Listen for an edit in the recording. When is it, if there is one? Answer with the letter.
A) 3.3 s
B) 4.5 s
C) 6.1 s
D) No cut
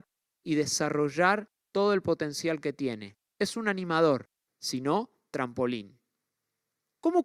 B